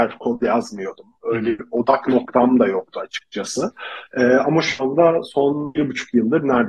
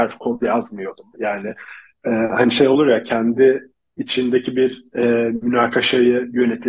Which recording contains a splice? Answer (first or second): second